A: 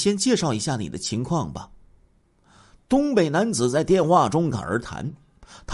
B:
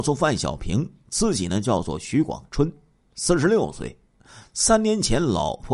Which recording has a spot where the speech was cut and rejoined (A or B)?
A